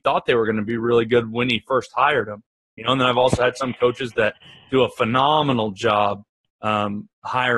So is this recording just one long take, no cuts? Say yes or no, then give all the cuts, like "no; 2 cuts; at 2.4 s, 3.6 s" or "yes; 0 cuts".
yes; 0 cuts